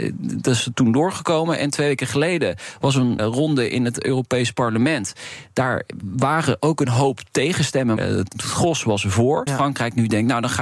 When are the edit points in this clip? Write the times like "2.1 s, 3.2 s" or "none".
3.2 s, 8.0 s, 9.5 s